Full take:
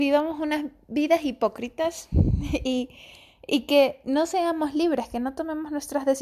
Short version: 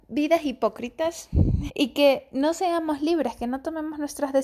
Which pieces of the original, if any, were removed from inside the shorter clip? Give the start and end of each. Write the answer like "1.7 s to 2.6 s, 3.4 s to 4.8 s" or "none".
2.5 s to 3.4 s